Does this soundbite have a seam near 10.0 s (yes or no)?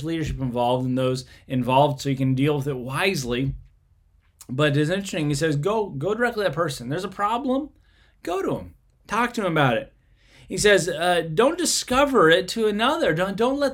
no